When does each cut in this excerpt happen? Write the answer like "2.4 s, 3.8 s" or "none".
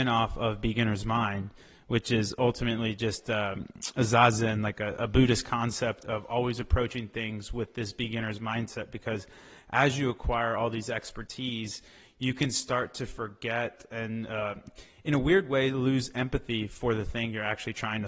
none